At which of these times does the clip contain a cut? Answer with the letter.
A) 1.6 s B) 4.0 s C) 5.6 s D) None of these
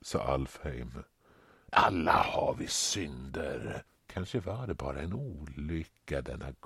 B